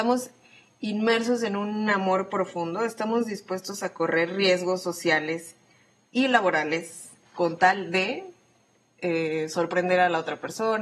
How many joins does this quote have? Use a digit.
0